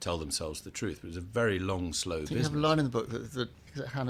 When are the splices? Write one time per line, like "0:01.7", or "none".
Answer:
none